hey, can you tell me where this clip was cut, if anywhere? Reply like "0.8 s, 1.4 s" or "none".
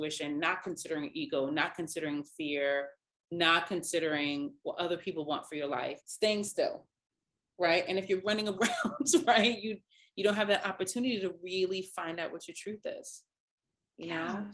6.0 s